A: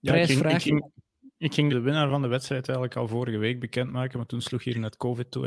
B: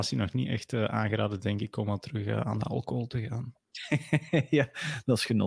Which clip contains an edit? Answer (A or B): A